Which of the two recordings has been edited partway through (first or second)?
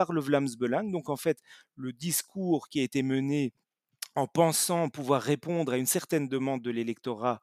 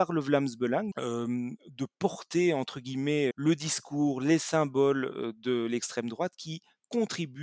second